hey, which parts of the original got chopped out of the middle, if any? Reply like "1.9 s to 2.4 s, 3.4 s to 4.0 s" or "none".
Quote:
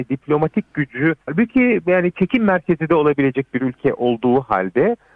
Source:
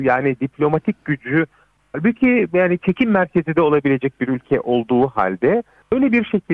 1.5 s to 1.9 s